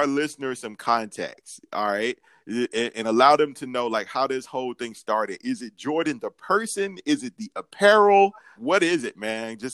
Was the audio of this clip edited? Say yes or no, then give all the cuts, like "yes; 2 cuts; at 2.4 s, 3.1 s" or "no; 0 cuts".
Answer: yes; 1 cut; at 8.6 s